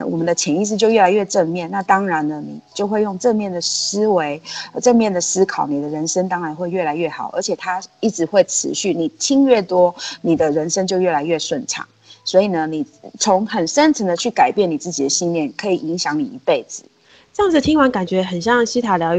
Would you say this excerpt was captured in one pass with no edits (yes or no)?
yes